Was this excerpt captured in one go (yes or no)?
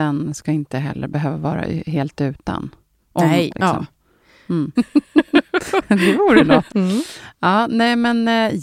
no